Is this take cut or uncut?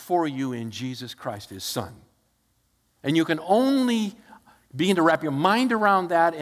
cut